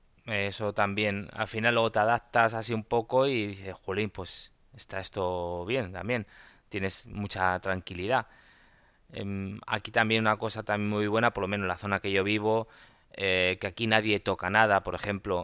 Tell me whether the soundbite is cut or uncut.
uncut